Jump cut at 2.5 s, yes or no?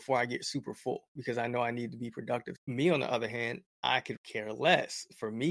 yes